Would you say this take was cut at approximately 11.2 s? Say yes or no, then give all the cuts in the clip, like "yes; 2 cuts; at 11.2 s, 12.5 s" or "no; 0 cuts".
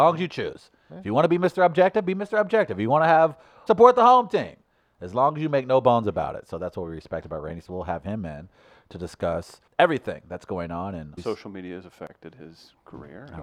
yes; 3 cuts; at 3.7 s, 9.7 s, 11.2 s